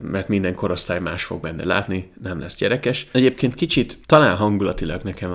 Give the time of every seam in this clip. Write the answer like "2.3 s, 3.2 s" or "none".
3.1 s